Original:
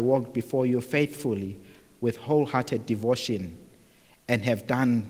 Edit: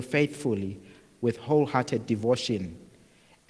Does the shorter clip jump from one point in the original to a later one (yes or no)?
no